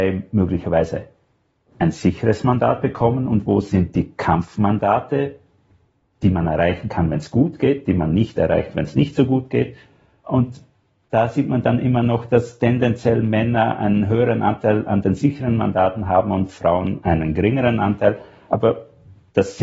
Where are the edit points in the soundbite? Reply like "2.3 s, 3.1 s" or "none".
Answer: none

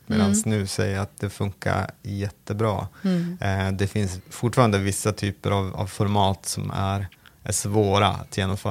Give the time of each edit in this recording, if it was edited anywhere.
none

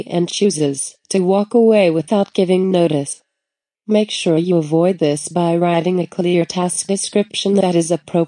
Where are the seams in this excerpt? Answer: 3.7 s

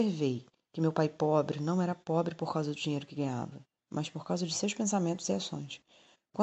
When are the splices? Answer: 3.8 s

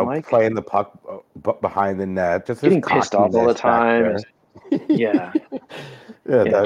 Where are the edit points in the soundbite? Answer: 2.5 s

